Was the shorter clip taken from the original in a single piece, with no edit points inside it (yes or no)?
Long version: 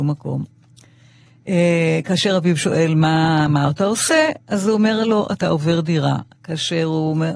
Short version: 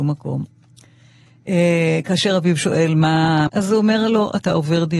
no